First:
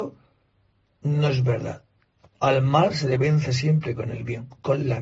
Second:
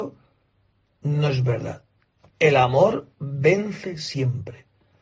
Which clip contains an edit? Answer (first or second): first